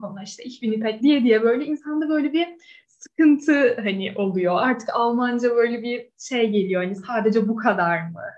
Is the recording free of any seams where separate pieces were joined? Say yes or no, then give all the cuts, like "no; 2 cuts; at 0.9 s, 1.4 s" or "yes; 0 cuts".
no; 1 cut; at 1.0 s